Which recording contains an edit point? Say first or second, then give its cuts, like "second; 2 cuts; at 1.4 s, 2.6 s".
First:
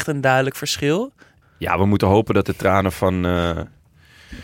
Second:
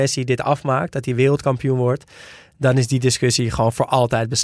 first; 1 cut; at 1.4 s